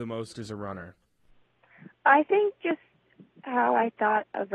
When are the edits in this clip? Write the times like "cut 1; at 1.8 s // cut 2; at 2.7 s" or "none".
none